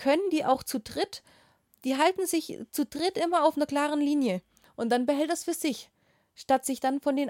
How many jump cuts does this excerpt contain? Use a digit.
1